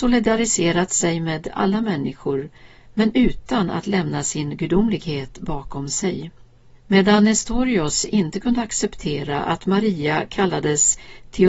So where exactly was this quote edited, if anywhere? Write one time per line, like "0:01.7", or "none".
0:06.7